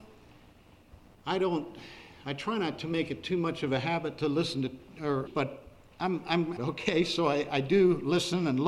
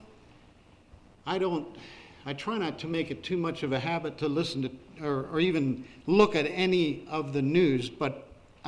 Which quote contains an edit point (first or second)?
first